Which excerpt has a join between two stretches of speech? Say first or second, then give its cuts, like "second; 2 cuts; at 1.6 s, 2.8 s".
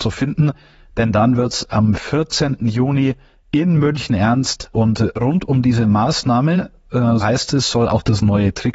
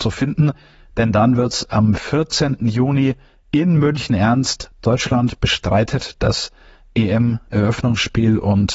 first; 2 cuts; at 4.7 s, 7.2 s